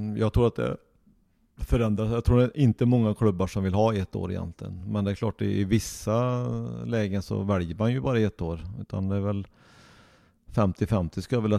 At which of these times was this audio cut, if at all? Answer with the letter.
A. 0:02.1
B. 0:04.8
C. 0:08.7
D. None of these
D